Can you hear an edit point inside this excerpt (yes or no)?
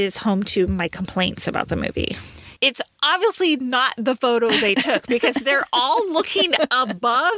yes